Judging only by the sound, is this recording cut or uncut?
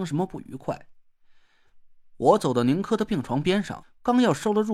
cut